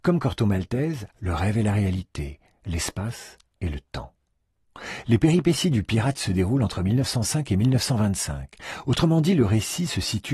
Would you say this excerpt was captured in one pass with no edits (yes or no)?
no